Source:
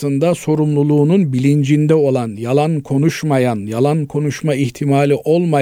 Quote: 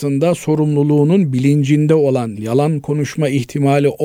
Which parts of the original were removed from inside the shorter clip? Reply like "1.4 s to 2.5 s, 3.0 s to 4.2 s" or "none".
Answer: 2.4 s to 3.6 s